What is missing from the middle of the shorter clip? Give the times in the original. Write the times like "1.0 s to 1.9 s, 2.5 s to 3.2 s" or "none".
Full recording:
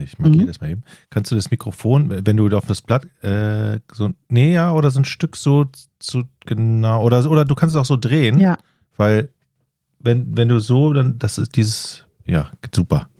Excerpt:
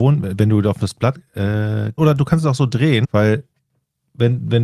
3.9 s to 7.3 s, 8.3 s to 8.9 s

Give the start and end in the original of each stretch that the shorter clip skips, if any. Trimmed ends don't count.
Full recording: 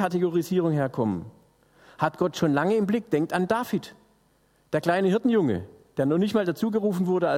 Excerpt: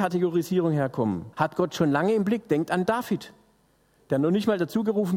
1.3 s to 1.9 s, 4.6 s to 5.9 s

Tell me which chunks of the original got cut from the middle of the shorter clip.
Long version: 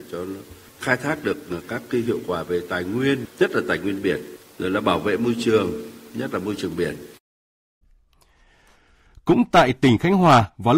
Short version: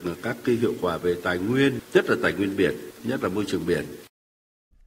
4.4 s to 6.1 s

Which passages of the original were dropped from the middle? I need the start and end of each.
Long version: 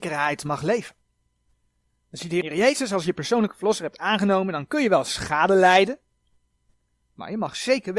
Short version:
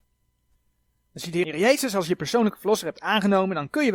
none

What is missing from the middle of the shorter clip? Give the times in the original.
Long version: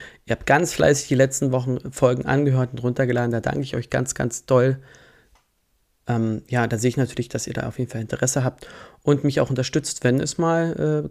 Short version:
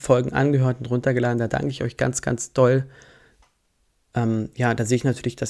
none

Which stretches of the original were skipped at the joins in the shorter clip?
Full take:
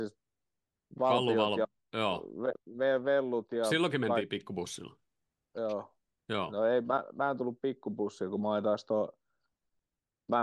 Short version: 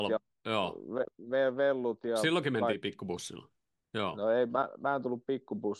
5.3 s to 6.1 s

